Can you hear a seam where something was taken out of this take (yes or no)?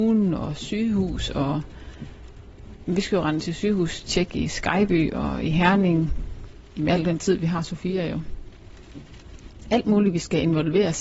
no